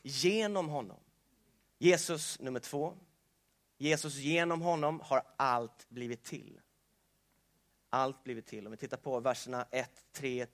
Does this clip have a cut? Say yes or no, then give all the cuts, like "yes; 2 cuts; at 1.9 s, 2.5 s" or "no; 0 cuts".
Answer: yes; 1 cut; at 1.7 s